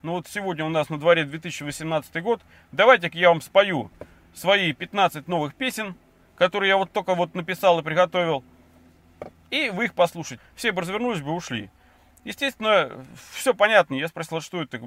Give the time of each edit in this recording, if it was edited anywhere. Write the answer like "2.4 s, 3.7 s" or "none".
10.4 s, 13.9 s